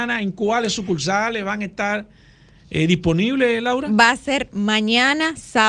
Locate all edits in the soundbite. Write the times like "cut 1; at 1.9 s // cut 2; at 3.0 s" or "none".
none